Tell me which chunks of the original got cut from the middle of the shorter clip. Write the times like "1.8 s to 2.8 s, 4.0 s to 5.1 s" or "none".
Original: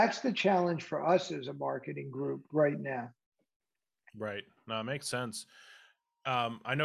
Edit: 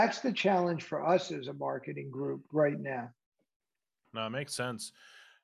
4.0 s to 4.6 s